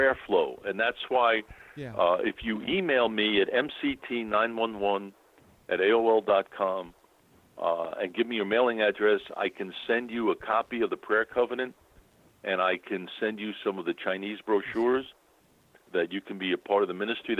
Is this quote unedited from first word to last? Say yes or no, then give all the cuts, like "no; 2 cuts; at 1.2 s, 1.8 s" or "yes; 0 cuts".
yes; 0 cuts